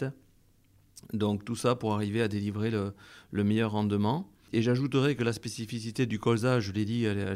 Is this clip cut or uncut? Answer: uncut